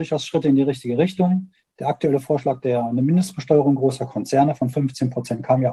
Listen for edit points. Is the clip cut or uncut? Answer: uncut